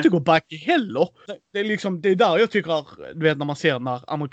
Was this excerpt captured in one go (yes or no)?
no